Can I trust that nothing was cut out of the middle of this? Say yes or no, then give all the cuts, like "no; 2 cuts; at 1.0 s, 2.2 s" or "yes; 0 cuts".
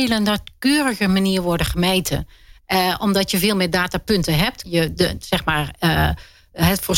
no; 1 cut; at 4.6 s